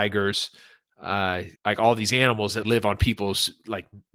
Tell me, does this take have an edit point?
yes; 2 cuts; at 1.6 s, 2.6 s

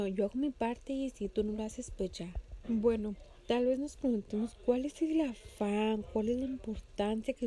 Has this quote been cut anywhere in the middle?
yes; 1 cut; at 2.6 s

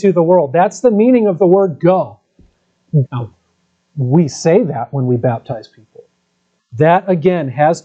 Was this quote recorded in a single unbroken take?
no; 2 cuts; at 3.0 s, 6.6 s

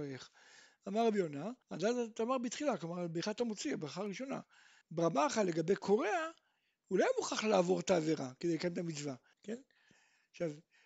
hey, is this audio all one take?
no; 3 cuts; at 1.6 s, 4.8 s, 9.3 s

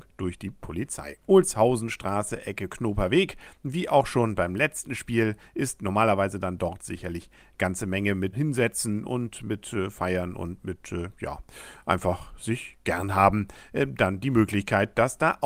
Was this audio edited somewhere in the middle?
yes; 2 cuts; at 1.3 s, 8.3 s

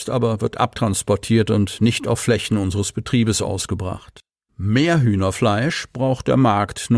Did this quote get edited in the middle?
yes; 1 cut; at 4.5 s

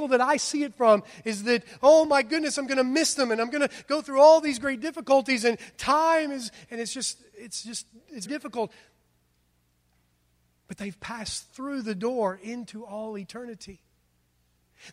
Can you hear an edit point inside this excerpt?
yes; 1 cut; at 8.3 s

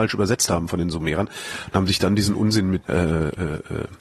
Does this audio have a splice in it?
yes; 1 cut; at 2.8 s

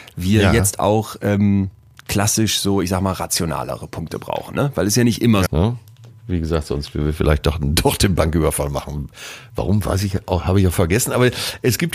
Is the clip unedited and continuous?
no; 1 cut; at 5.5 s

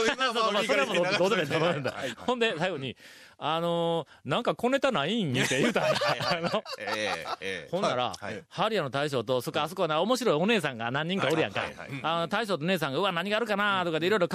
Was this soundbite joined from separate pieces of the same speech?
no; 0 cuts

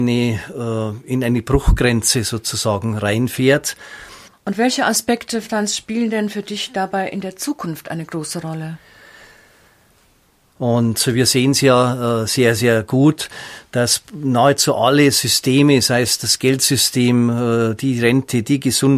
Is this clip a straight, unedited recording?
no; 2 cuts; at 4.3 s, 10.5 s

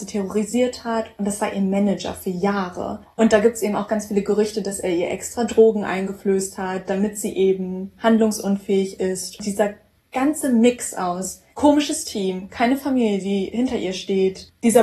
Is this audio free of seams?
no; 1 cut; at 11.5 s

